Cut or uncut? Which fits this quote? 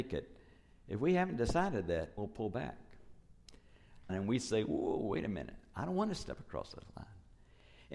cut